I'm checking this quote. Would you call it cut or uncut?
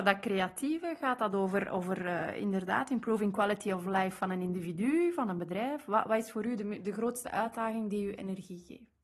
uncut